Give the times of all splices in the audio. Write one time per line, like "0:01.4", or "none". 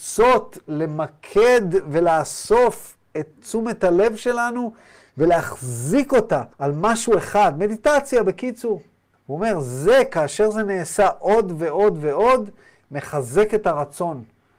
0:06.5
0:09.1